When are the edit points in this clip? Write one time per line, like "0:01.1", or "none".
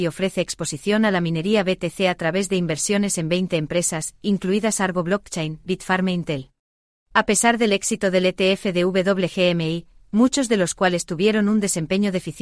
0:07.0
0:10.0